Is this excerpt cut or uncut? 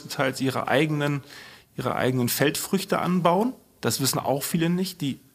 uncut